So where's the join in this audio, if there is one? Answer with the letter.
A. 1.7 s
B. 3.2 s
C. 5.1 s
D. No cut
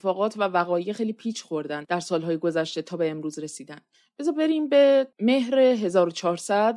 C